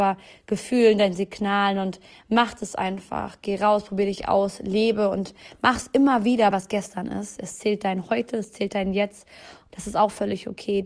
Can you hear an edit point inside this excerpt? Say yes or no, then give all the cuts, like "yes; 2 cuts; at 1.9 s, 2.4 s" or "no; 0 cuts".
yes; 2 cuts; at 6.5 s, 9.7 s